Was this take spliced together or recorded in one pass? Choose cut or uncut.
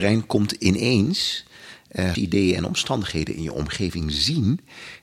cut